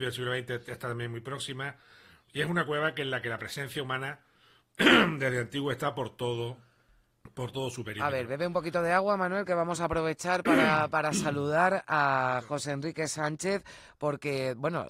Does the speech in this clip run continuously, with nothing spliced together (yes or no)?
no